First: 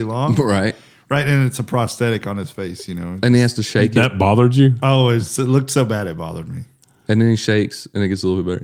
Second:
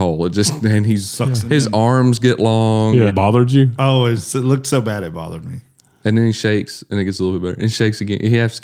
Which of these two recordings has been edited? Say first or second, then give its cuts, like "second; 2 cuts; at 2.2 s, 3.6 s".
second; 1 cut; at 3.1 s